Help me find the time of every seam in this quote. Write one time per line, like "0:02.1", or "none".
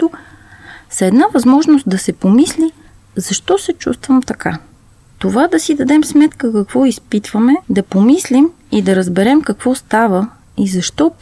0:05.1
0:07.6